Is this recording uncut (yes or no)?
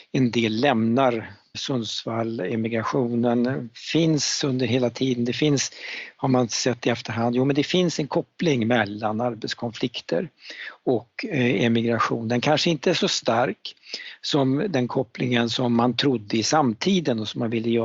no